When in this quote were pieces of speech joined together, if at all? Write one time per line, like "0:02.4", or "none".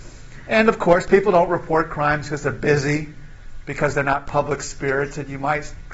none